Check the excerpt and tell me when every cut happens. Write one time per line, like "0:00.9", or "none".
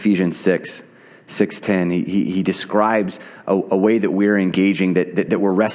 none